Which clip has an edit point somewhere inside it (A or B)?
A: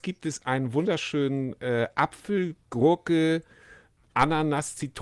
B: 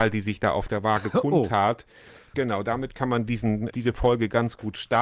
B